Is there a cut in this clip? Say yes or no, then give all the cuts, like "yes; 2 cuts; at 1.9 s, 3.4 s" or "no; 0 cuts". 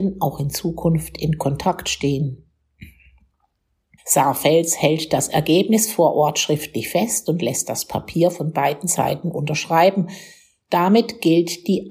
yes; 1 cut; at 4.0 s